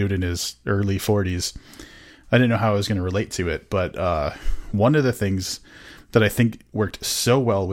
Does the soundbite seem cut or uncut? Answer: uncut